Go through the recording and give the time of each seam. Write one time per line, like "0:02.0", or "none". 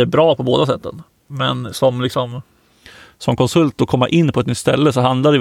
none